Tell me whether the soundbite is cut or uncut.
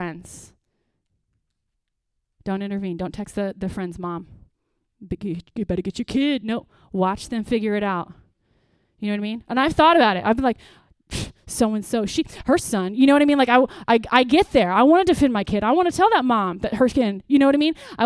uncut